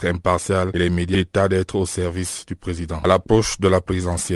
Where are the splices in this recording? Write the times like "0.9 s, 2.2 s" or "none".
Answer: 3.0 s

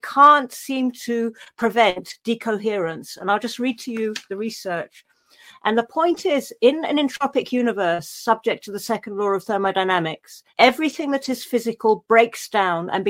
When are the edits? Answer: 5.5 s, 10.5 s

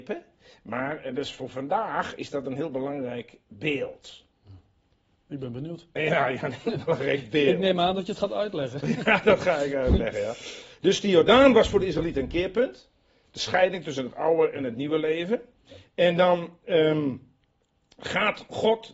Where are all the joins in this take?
none

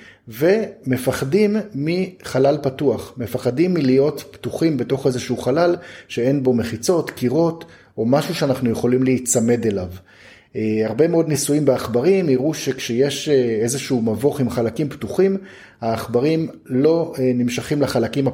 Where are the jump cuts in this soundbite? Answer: none

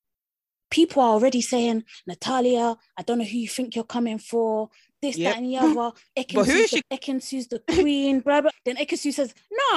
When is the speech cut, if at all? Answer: 6.8 s, 8.5 s

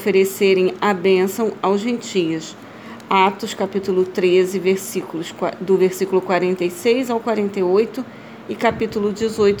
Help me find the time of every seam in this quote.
none

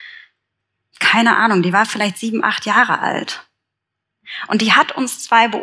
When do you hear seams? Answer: 0.9 s

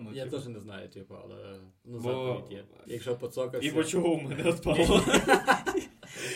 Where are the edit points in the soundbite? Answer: 2.9 s

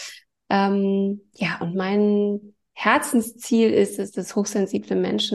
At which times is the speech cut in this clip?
none

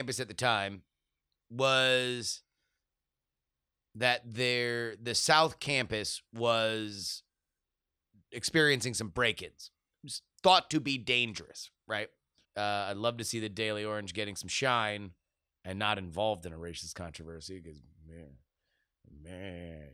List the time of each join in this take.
12.4 s

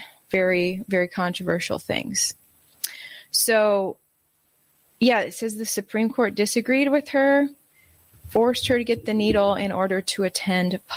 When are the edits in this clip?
none

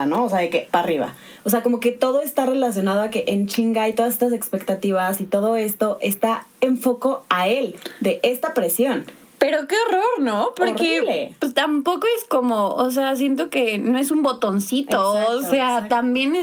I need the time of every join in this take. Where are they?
none

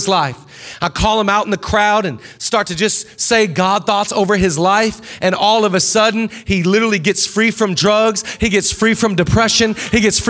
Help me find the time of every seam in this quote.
none

